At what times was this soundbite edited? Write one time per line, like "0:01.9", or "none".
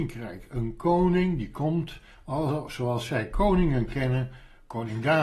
none

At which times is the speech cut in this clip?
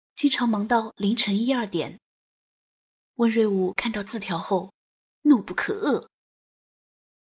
0:03.0

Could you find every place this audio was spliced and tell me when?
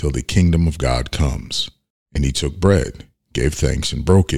none

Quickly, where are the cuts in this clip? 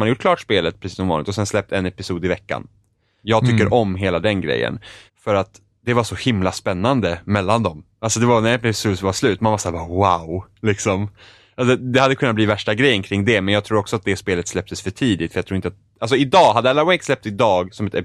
0:03.2
0:05.1

